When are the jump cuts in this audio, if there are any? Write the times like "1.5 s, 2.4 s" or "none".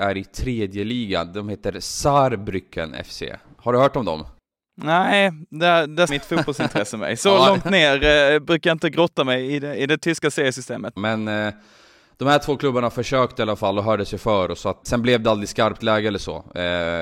6.1 s, 11.0 s, 14.8 s